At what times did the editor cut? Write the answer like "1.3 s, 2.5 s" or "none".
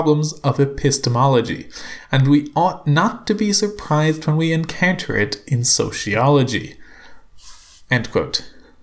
none

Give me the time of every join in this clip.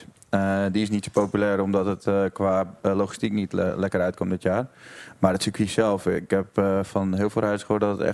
none

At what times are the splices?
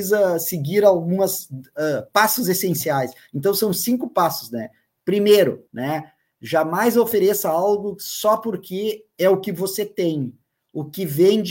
5.7 s

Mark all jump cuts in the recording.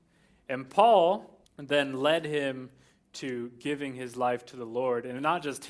1.5 s

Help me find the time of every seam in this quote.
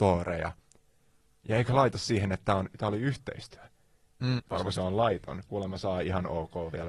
4.4 s, 5.5 s

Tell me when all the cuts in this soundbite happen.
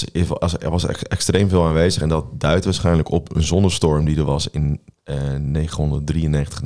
none

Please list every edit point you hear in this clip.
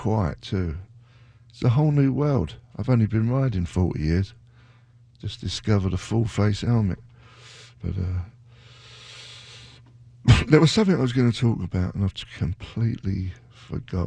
7.8 s

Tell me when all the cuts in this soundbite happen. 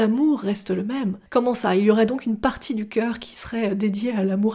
1.3 s

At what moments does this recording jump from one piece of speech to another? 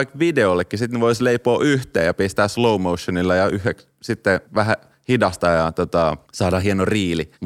none

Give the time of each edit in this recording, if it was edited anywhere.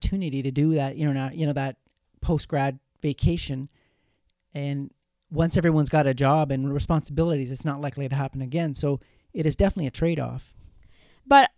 none

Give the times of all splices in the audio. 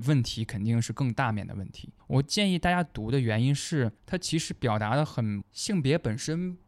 2.0 s, 4.0 s, 5.4 s

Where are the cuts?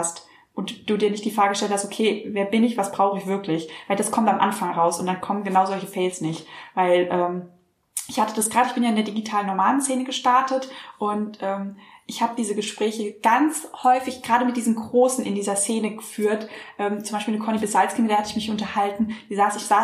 none

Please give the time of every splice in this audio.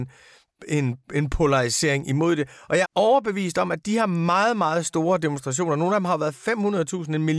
2.9 s

